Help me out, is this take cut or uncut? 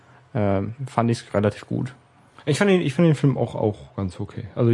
uncut